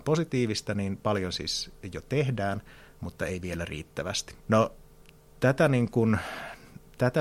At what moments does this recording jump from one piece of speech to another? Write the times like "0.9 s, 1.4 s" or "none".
4.4 s